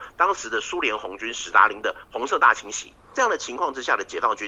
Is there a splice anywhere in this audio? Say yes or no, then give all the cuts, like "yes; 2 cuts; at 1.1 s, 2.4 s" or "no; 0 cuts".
yes; 1 cut; at 3.0 s